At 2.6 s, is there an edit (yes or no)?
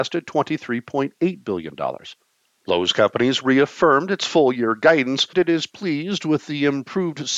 yes